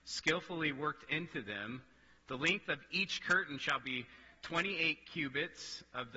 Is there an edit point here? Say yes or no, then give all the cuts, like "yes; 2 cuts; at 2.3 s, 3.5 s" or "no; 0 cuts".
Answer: no; 0 cuts